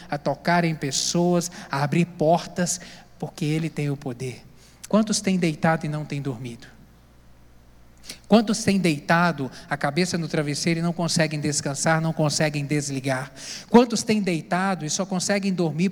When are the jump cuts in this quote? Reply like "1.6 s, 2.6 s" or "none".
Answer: 4.9 s

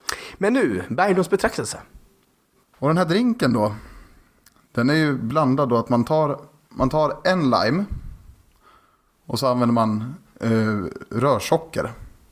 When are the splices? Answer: 2.6 s

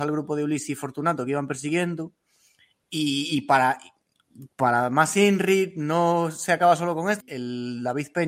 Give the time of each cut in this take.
7.2 s

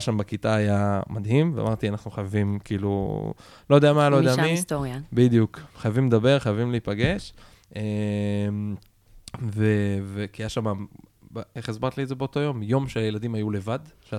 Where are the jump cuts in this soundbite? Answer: none

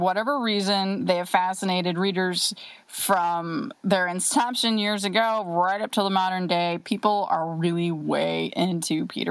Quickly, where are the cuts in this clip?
none

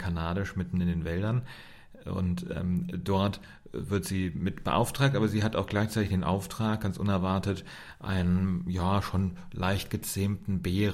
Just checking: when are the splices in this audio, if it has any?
none

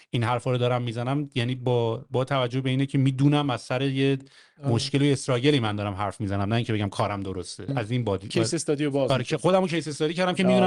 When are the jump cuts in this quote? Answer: 7.7 s

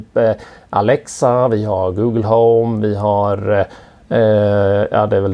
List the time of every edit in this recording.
none

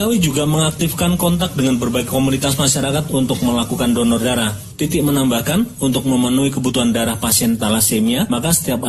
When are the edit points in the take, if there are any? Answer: none

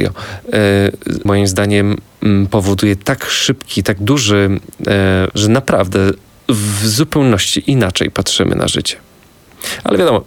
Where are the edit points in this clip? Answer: 1.3 s, 5.3 s

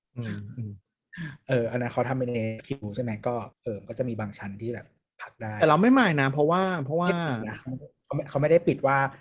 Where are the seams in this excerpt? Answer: 3.5 s

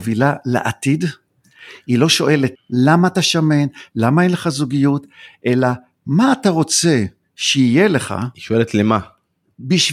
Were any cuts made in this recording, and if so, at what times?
2.5 s

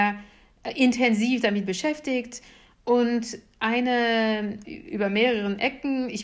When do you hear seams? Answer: 4.6 s

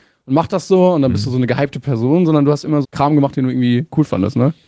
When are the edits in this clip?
2.8 s

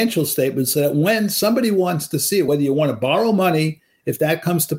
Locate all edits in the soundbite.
none

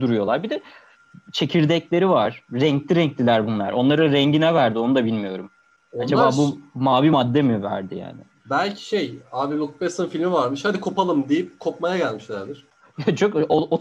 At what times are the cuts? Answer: none

